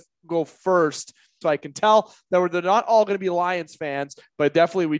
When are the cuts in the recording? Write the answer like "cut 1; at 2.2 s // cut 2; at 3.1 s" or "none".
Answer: cut 1; at 1.4 s